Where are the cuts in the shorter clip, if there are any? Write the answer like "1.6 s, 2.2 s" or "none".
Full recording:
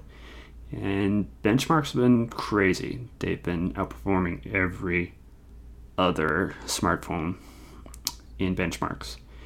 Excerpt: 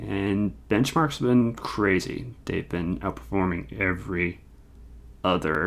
none